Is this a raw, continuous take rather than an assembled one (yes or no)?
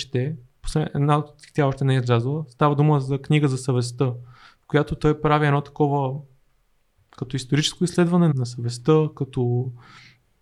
no